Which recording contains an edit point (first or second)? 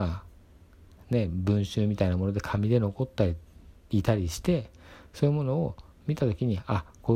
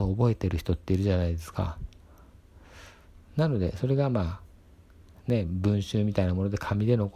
second